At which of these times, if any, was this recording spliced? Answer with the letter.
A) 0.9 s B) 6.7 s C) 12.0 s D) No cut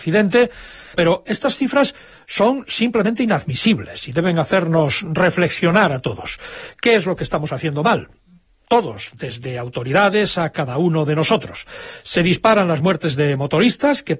A